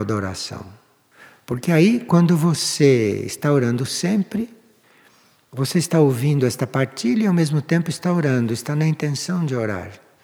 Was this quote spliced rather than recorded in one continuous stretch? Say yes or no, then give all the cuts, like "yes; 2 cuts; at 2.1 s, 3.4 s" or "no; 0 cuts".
no; 0 cuts